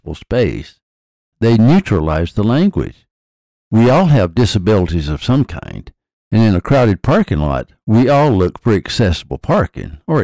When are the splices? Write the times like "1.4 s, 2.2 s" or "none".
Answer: 1.3 s